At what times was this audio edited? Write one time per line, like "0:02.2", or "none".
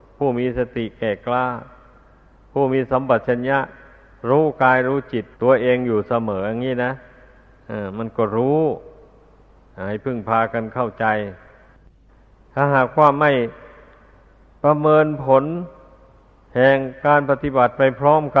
0:05.3